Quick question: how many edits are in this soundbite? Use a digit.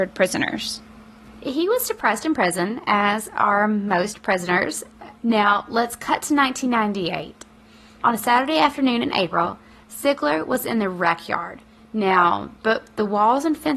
2